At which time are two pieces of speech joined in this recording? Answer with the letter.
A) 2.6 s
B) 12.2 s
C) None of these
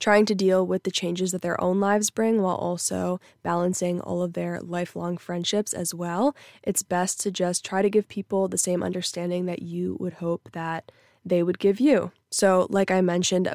B